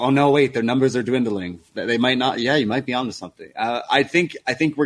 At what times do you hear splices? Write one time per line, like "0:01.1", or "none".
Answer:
none